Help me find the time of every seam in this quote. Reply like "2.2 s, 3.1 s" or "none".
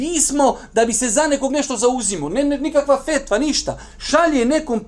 none